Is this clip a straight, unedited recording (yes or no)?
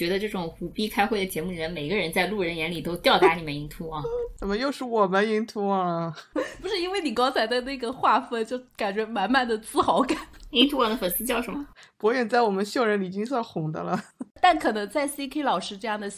yes